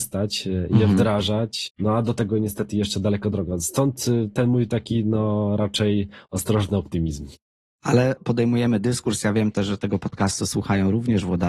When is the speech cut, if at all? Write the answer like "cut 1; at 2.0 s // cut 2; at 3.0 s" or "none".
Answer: cut 1; at 6.2 s